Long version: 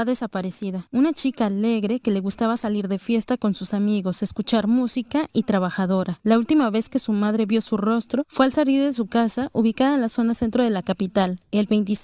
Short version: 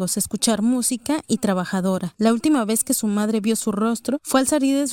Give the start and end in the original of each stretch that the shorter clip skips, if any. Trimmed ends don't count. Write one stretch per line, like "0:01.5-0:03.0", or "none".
none